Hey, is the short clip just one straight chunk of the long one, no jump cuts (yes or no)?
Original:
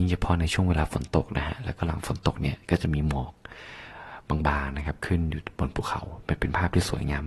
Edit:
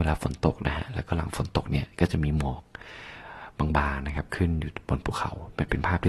yes